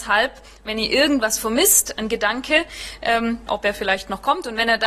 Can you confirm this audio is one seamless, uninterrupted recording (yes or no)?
no